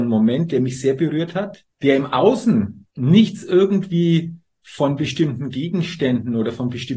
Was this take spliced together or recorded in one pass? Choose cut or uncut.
cut